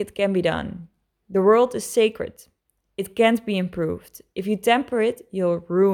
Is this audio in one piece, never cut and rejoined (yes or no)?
yes